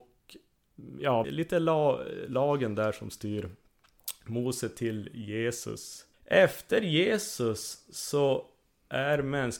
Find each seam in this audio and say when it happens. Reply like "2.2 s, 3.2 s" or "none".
1.2 s, 6.1 s

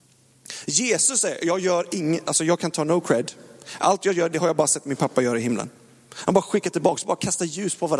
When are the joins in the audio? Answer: 4.3 s

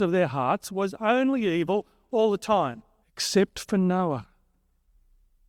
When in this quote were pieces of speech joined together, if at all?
3.0 s

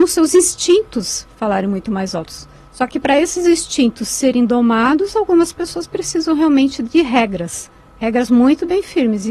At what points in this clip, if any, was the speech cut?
none

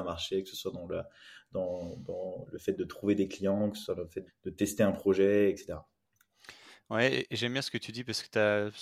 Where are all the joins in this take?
4.3 s

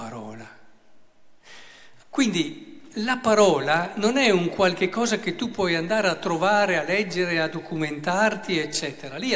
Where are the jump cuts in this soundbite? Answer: 2.0 s

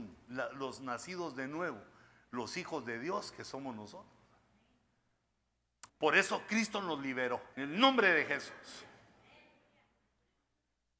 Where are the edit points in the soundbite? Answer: 5.9 s, 7.5 s

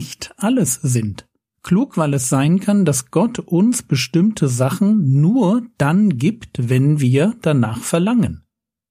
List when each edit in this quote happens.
1.5 s

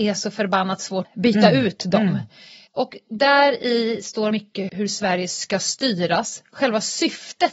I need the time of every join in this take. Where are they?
4.7 s

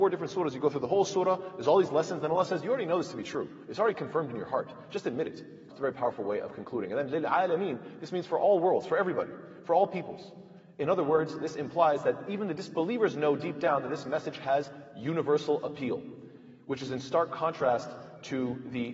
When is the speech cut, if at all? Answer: 5.7 s

